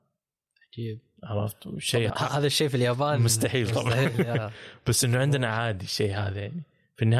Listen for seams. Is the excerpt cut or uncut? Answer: cut